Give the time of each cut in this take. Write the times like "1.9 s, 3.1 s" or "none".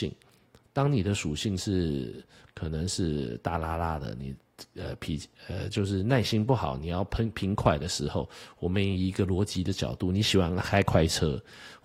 none